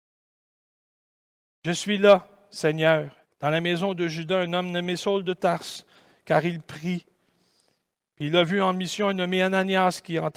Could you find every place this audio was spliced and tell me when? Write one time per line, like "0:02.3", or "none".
0:03.2